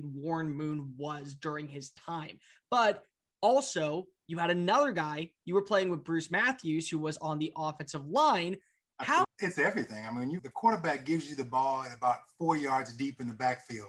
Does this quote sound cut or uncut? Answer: cut